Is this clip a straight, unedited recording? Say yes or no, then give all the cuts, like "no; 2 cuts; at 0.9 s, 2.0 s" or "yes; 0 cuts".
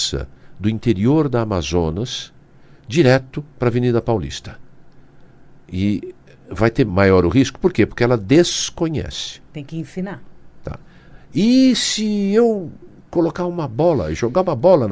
no; 1 cut; at 6.9 s